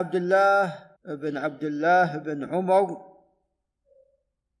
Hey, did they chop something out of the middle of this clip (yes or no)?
yes